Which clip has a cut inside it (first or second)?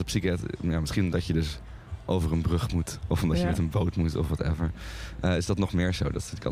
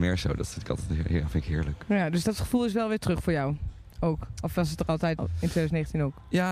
second